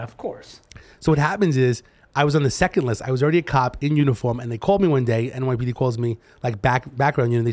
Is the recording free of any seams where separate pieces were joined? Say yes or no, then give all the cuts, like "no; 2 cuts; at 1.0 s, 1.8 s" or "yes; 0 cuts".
yes; 0 cuts